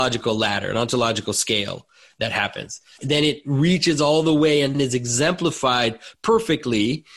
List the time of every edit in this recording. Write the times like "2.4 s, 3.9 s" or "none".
3.0 s, 4.7 s